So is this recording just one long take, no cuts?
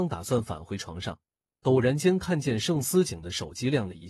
yes; 0 cuts

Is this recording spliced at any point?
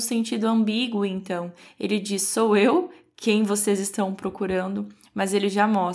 no; 0 cuts

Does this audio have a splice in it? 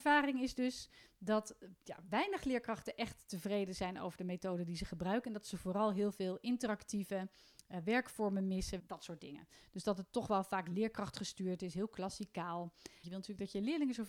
yes; 2 cuts; at 8.8 s, 13.0 s

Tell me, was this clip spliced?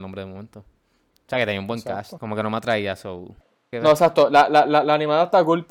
yes; 2 cuts; at 2.2 s, 3.7 s

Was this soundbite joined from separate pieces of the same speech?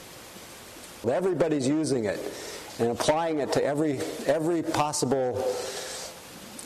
yes; 1 cut; at 1.0 s

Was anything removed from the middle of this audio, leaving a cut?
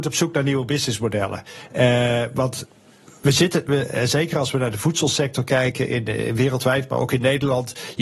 no; 0 cuts

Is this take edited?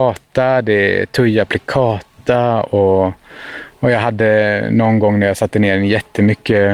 no; 0 cuts

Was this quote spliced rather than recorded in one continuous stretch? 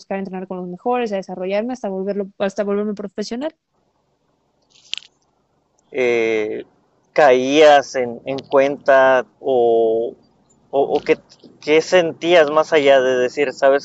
yes; 2 cuts; at 5.8 s, 9.3 s

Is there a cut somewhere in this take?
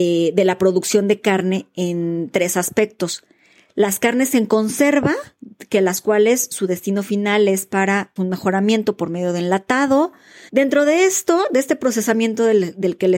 yes; 2 cuts; at 8.2 s, 10.5 s

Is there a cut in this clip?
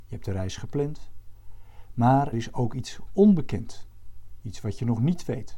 yes; 1 cut; at 2.3 s

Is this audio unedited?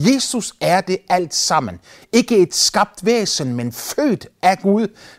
yes; 0 cuts

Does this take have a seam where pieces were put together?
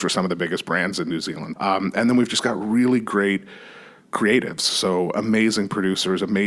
yes; 1 cut; at 1.5 s

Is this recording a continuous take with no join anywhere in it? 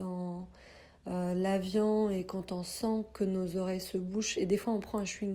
yes; 0 cuts

